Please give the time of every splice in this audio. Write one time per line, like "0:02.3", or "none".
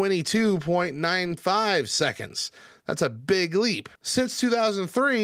0:04.0

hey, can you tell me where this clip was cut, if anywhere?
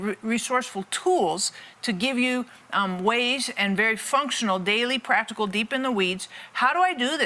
none

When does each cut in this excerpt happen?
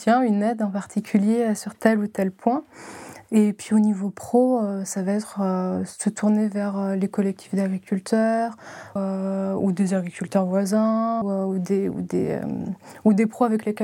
0:09.0
0:11.2

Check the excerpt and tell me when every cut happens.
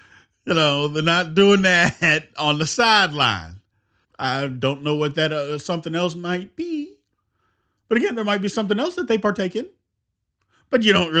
0:04.0

